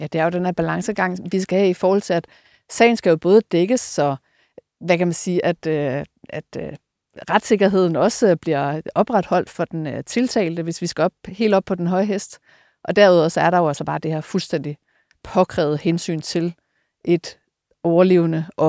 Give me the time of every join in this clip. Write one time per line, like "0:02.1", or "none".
none

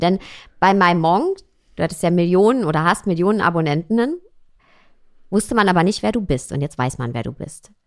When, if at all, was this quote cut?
none

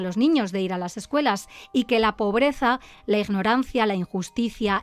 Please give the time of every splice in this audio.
none

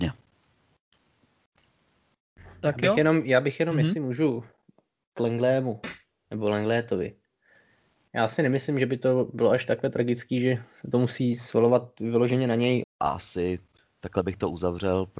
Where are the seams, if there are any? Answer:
0:12.8

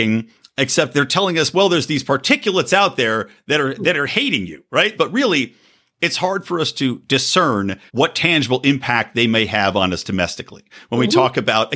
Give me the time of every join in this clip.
0:05.0
0:07.9

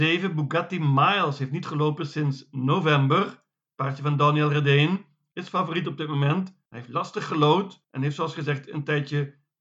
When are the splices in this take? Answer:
none

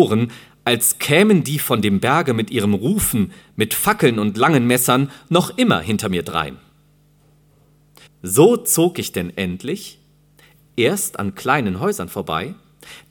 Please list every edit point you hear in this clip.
0:08.1

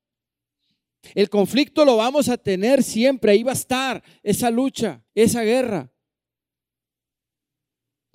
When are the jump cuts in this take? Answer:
0:01.0
0:05.1

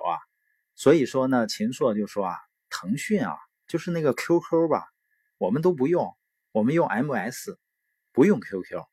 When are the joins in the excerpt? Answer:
none

